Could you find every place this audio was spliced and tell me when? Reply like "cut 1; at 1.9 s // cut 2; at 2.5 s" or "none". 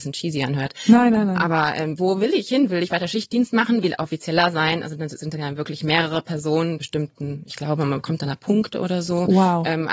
cut 1; at 3.8 s // cut 2; at 6.8 s